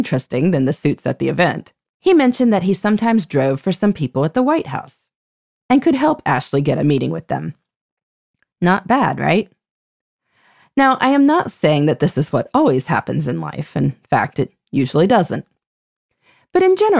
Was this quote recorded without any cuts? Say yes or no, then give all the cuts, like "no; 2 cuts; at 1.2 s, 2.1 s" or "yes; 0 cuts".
yes; 0 cuts